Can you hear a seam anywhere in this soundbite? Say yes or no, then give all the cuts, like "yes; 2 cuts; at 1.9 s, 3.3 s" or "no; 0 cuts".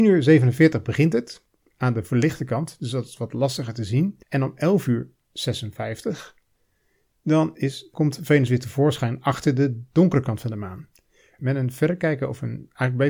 yes; 2 cuts; at 4.2 s, 11.4 s